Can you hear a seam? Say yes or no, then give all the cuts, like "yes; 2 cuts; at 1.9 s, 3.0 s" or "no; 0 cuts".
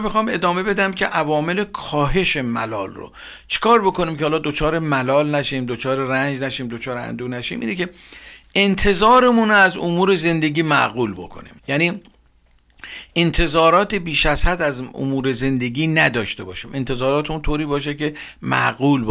yes; 1 cut; at 11.6 s